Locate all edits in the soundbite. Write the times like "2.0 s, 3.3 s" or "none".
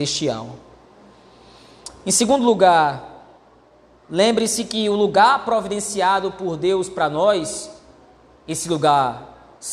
none